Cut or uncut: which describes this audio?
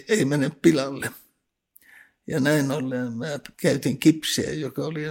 uncut